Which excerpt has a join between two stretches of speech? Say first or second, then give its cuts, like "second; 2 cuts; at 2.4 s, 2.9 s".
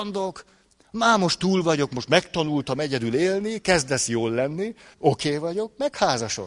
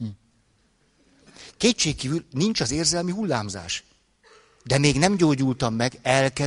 first; 1 cut; at 4.9 s